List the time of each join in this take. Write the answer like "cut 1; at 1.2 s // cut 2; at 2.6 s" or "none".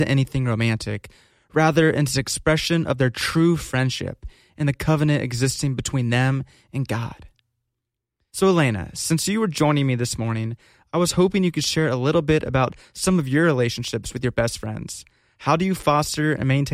cut 1; at 8.3 s